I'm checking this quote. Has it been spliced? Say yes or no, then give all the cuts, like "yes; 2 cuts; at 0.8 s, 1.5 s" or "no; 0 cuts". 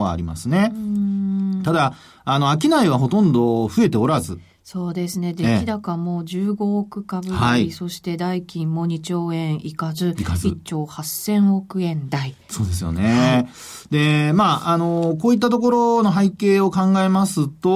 no; 0 cuts